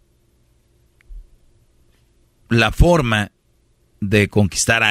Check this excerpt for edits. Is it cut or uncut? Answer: uncut